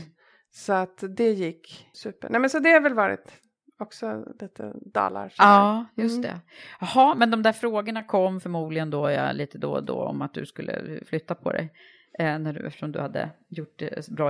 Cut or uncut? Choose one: cut